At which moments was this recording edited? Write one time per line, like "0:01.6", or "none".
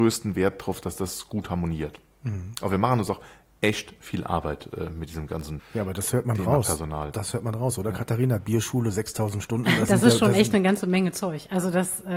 0:05.6